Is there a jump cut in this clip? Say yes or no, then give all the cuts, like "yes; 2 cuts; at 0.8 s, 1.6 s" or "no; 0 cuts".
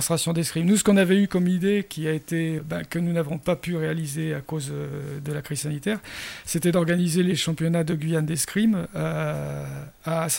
yes; 1 cut; at 2.6 s